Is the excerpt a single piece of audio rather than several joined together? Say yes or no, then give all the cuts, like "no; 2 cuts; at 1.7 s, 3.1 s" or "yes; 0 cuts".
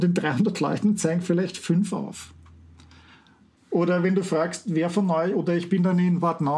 no; 1 cut; at 3.6 s